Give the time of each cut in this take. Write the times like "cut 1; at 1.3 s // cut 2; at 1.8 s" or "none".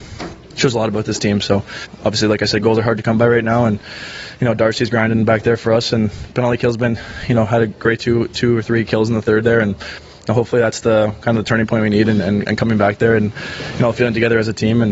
none